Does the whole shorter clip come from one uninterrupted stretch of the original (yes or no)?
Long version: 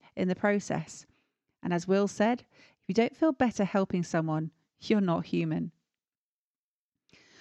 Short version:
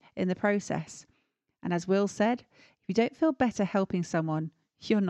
yes